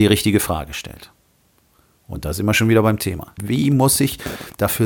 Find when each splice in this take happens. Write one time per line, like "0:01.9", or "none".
0:03.4